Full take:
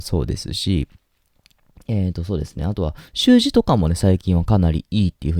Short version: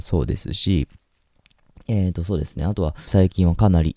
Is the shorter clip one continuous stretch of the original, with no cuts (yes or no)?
no